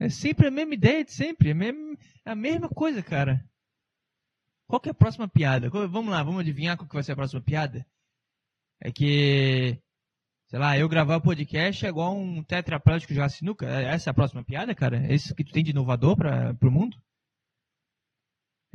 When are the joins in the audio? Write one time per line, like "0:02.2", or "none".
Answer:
none